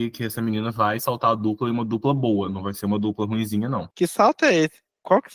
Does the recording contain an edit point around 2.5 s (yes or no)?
no